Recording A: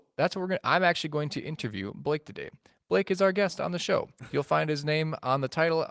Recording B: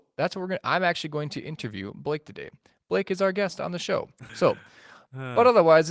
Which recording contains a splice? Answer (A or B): B